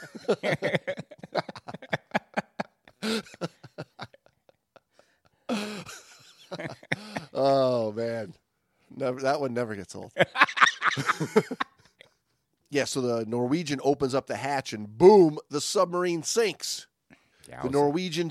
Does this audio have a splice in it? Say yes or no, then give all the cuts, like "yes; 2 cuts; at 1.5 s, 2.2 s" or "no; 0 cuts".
no; 0 cuts